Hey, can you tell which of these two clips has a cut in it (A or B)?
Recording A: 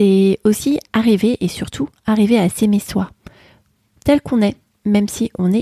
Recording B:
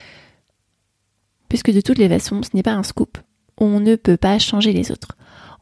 B